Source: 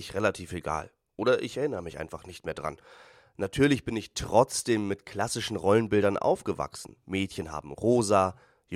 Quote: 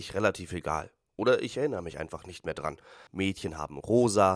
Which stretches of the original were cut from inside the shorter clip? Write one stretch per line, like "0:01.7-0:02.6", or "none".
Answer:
0:03.1-0:07.0